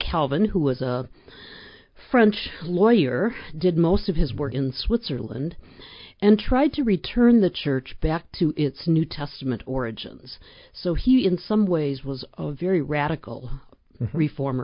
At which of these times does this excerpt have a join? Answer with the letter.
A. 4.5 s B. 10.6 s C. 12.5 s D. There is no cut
A